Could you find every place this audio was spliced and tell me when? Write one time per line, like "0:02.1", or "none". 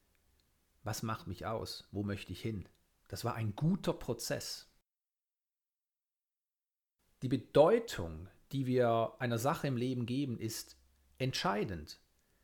0:02.9